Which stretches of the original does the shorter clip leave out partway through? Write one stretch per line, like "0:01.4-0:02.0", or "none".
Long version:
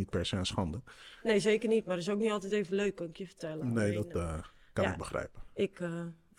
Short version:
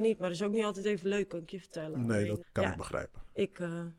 0:04.1-0:04.6